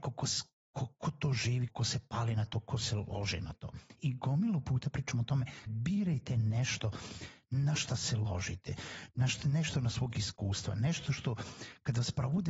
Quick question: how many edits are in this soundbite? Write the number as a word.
two